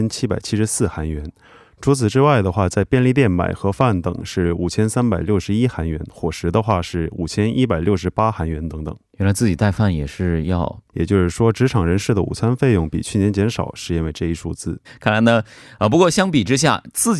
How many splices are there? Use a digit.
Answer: 2